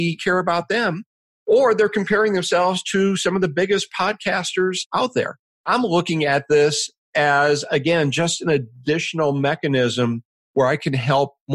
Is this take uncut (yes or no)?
yes